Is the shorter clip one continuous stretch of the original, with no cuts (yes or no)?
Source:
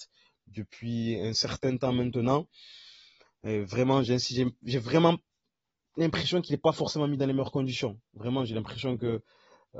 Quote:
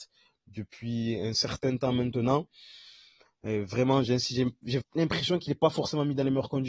no